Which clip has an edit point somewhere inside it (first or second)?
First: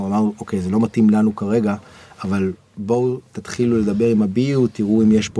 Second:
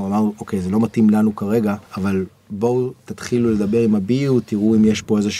second